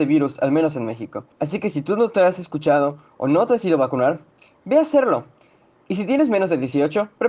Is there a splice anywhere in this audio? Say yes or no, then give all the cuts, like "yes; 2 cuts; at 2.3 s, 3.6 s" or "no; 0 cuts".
yes; 1 cut; at 1.3 s